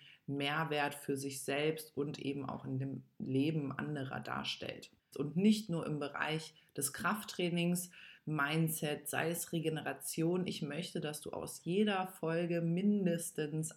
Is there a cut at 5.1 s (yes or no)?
yes